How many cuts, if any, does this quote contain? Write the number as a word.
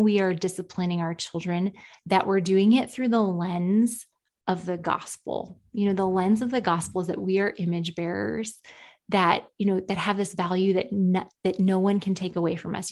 zero